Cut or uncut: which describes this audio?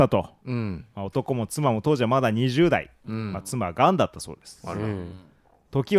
uncut